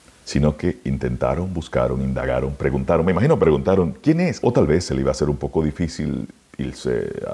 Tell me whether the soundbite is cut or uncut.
cut